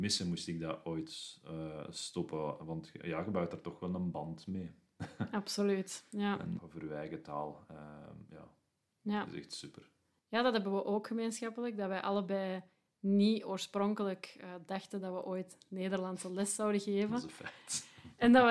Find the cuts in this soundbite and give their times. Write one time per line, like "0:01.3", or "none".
0:06.6